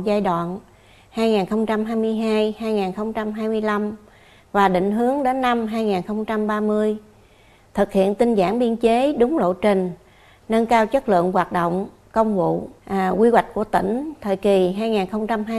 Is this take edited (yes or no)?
yes